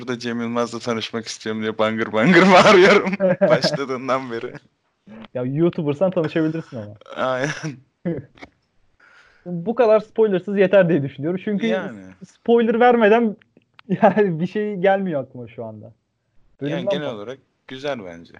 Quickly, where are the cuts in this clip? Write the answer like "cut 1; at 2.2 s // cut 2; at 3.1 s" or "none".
cut 1; at 5.3 s